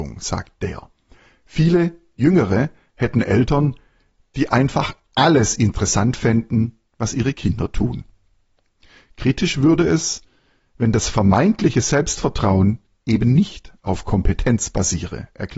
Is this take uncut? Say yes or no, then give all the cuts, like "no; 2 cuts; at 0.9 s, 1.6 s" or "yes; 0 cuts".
yes; 0 cuts